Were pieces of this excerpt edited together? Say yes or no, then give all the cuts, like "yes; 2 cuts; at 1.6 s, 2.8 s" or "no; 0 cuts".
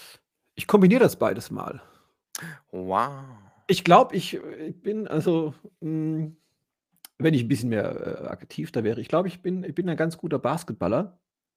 no; 0 cuts